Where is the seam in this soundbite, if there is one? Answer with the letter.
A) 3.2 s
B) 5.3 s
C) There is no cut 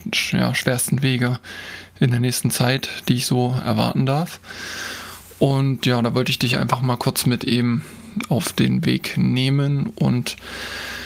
C